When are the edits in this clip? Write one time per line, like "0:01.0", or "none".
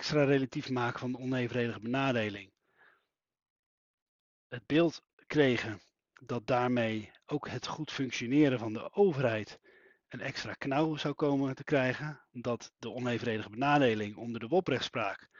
none